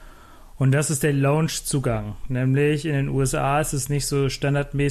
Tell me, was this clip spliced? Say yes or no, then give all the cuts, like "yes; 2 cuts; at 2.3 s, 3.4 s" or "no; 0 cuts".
no; 0 cuts